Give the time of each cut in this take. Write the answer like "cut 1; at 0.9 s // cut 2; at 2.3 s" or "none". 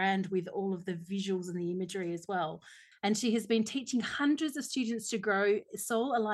cut 1; at 2.9 s